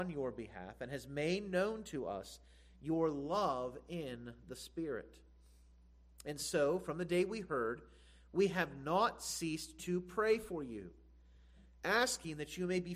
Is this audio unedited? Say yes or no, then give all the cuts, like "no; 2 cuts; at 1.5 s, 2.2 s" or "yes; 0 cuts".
yes; 0 cuts